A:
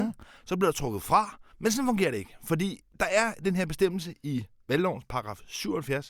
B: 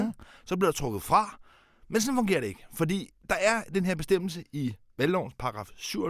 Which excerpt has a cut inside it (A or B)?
A